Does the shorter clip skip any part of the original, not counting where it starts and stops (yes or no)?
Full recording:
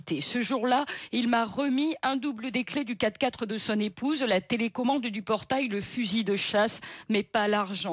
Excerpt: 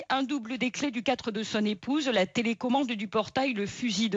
yes